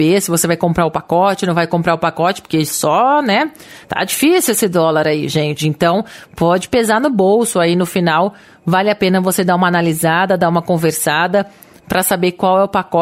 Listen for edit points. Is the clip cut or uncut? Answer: uncut